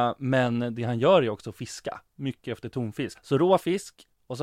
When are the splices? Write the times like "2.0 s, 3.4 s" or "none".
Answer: 3.1 s